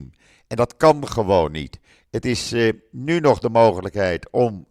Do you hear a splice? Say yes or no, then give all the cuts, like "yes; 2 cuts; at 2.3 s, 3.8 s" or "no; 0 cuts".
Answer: no; 0 cuts